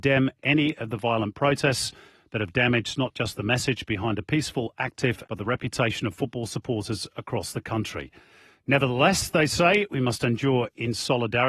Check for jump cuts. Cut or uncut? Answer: cut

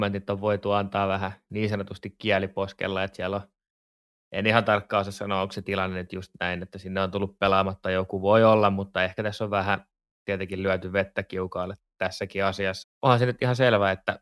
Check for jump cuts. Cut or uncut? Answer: cut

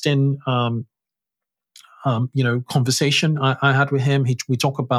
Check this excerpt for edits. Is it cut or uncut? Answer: uncut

